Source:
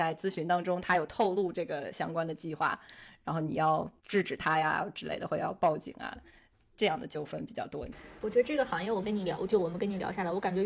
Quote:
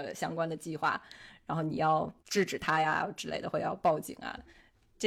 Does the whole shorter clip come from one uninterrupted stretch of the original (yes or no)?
yes